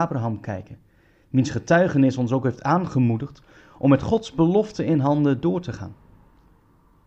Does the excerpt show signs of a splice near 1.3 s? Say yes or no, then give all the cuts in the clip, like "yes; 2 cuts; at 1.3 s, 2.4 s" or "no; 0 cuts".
no; 0 cuts